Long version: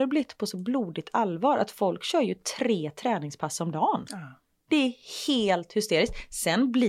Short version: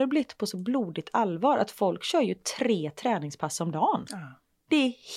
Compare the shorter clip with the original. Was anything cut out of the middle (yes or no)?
no